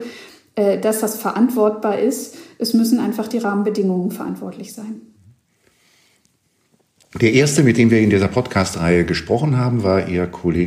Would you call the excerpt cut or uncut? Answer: uncut